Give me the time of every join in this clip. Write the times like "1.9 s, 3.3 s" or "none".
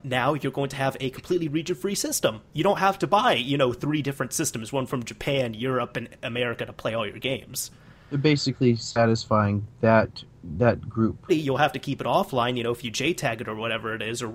11.3 s